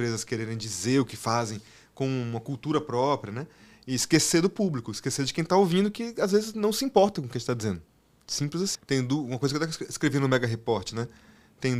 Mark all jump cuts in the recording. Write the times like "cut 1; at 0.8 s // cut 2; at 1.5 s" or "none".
cut 1; at 8.7 s